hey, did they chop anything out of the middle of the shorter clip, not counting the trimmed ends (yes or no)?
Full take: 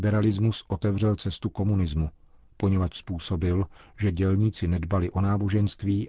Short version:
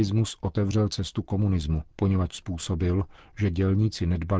yes